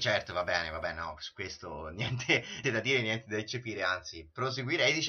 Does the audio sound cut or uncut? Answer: cut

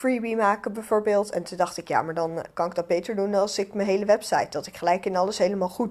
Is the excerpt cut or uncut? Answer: uncut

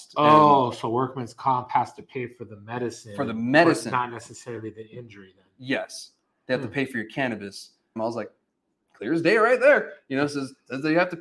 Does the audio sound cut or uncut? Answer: cut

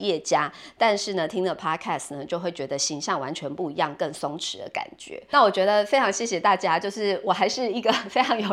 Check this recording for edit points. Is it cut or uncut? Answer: uncut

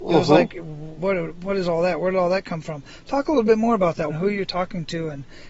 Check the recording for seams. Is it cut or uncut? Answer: cut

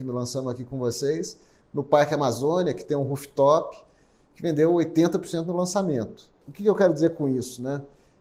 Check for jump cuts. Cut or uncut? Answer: uncut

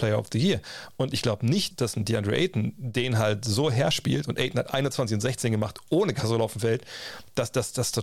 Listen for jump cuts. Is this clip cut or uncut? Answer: cut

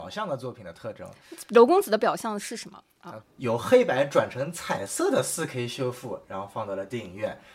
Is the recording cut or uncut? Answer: cut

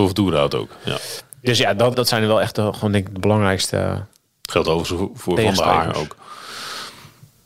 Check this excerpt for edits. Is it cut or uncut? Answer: cut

